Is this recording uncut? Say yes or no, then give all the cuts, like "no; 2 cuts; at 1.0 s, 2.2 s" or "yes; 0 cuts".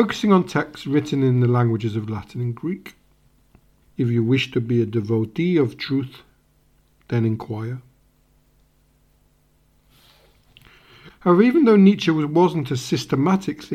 no; 2 cuts; at 3.8 s, 11.1 s